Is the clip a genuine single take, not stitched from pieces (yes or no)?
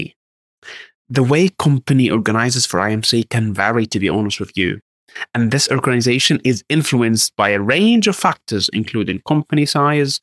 yes